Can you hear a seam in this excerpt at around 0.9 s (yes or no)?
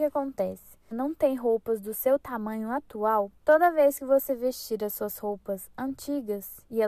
yes